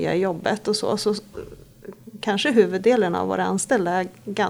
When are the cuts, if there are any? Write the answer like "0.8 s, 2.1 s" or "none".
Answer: none

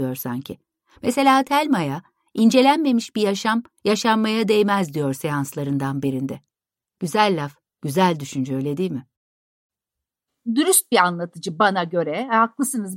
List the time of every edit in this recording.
none

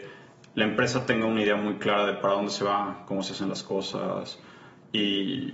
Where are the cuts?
none

